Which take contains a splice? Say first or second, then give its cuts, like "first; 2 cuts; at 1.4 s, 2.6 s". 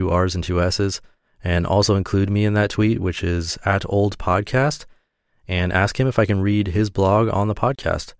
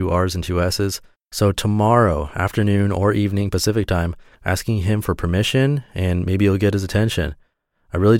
second; 2 cuts; at 1.1 s, 4.3 s